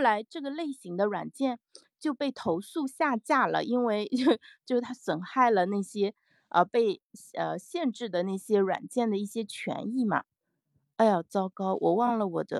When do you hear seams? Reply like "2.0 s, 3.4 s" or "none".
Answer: none

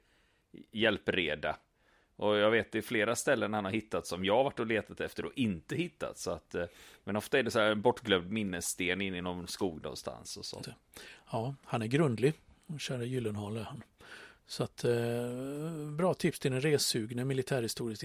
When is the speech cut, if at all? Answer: 10.6 s

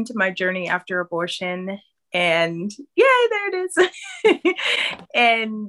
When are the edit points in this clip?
none

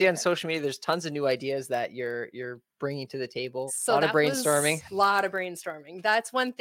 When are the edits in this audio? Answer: 3.7 s

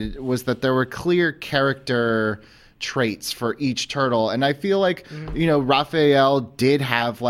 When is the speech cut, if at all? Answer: none

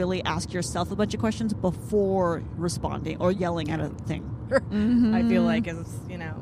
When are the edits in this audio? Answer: 4.5 s

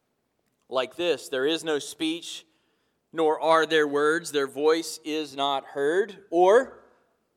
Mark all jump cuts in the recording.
none

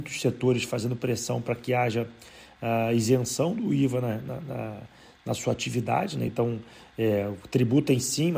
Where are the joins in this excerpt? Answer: none

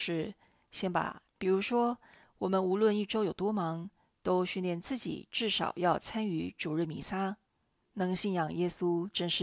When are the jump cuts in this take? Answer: 1.3 s, 7.8 s

